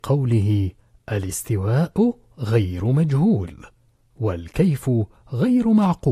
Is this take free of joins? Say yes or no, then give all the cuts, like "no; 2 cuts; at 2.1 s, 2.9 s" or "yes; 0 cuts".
yes; 0 cuts